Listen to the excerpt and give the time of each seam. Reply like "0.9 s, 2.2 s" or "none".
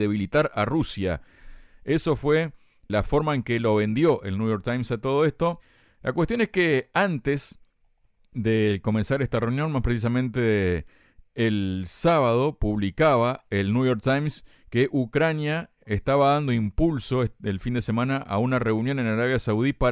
5.9 s